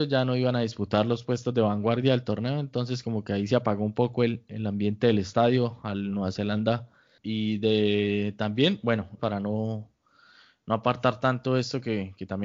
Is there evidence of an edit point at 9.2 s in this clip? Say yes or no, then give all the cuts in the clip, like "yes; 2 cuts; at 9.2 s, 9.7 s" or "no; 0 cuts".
yes; 2 cuts; at 7.2 s, 9.2 s